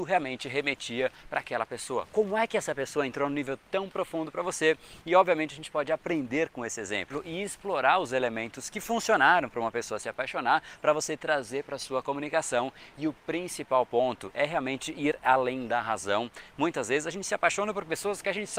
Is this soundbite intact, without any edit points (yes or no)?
yes